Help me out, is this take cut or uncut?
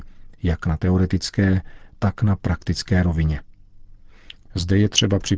cut